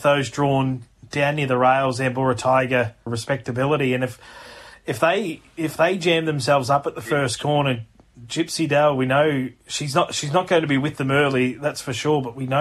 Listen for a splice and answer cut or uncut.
cut